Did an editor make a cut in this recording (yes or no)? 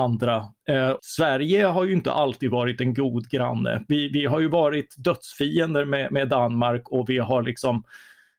yes